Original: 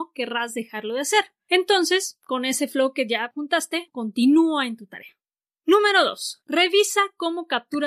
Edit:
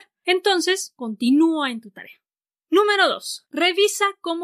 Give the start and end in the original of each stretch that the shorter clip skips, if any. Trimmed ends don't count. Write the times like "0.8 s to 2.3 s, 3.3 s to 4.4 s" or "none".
2.2 s to 3.9 s